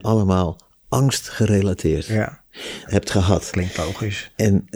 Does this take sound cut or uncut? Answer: cut